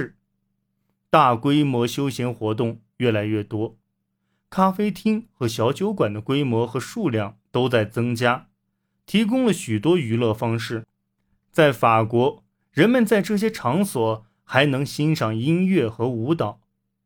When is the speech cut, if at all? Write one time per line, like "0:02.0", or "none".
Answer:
none